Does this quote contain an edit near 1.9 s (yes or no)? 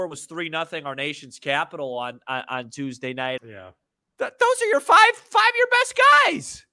no